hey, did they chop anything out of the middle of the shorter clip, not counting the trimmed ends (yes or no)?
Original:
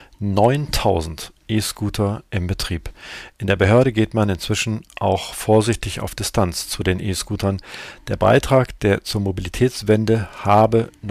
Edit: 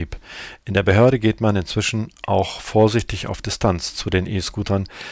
no